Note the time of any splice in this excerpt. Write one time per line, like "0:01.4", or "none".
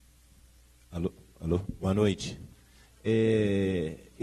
0:02.8